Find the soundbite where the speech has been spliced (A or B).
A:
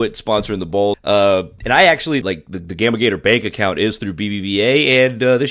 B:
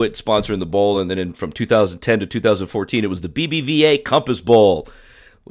A